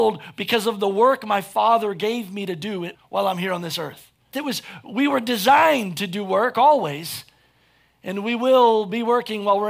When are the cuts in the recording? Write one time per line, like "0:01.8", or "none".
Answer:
0:02.9
0:04.3